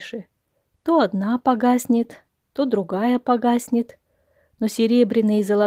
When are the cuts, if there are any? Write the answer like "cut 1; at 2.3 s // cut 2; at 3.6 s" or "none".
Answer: none